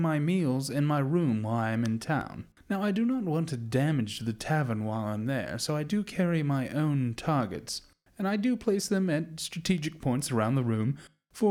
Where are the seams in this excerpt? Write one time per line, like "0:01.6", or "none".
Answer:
none